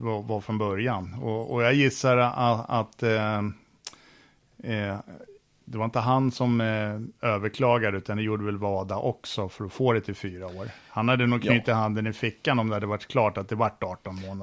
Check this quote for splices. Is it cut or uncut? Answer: uncut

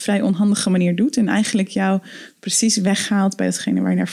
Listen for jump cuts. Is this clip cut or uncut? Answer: uncut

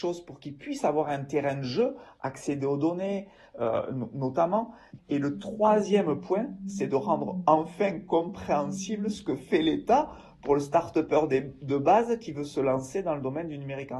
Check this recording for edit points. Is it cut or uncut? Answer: cut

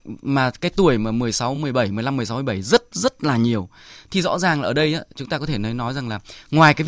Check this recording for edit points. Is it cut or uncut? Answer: uncut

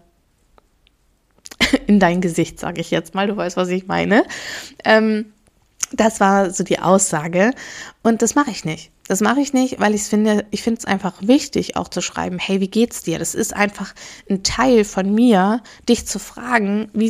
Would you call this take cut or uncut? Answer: uncut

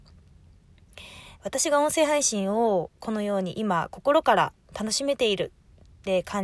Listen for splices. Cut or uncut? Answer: cut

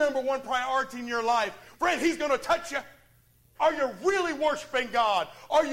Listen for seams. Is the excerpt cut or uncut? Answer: cut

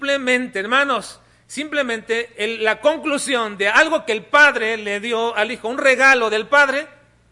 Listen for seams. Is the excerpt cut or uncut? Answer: uncut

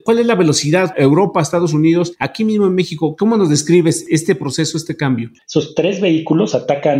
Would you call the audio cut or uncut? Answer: cut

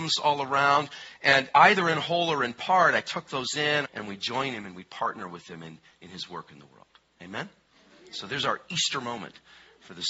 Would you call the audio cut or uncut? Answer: cut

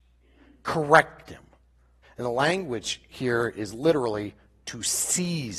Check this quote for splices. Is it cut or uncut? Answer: cut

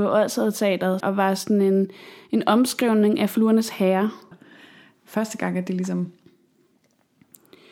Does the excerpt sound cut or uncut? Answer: cut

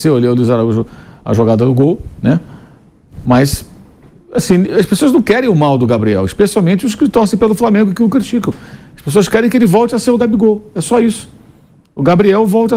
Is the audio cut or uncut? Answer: uncut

